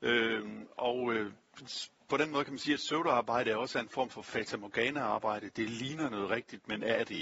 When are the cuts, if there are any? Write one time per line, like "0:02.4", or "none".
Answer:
none